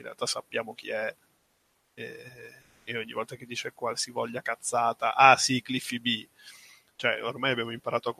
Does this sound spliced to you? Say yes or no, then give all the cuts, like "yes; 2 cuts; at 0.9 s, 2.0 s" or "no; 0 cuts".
no; 0 cuts